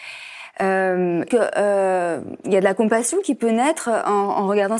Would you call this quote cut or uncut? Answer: cut